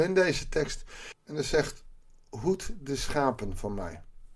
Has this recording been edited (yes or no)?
yes